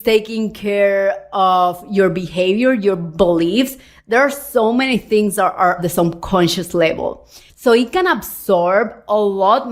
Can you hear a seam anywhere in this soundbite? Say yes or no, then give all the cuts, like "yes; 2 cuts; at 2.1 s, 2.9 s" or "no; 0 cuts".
yes; 1 cut; at 7.5 s